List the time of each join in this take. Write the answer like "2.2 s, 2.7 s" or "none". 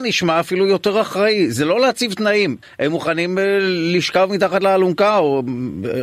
2.6 s